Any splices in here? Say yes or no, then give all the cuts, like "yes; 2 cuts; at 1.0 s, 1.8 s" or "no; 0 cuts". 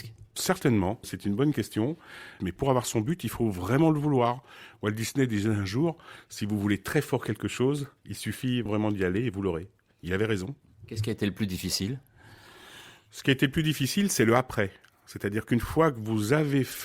yes; 1 cut; at 2.4 s